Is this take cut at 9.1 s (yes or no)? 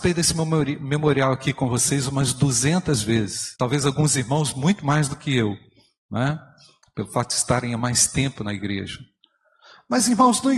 no